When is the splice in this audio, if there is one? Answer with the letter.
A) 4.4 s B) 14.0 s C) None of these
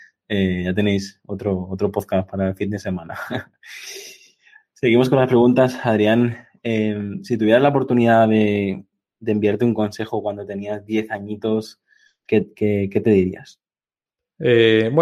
C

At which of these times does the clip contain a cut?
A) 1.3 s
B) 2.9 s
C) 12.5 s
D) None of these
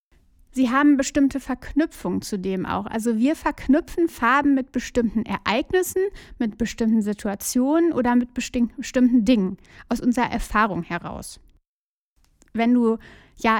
D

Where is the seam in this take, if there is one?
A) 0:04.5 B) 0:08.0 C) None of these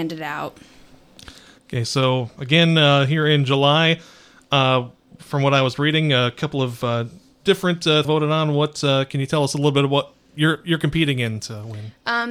B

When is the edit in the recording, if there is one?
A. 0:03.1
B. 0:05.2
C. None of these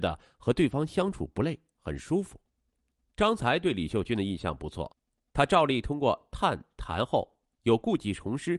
C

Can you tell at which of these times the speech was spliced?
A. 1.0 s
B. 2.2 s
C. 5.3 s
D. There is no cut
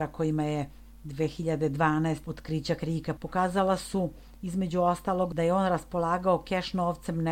B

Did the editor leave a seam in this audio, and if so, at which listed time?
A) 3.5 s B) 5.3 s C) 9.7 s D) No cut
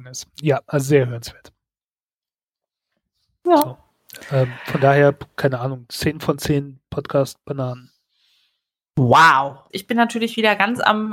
C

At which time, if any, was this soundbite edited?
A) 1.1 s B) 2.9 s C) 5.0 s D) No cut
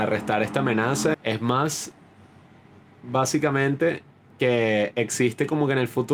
A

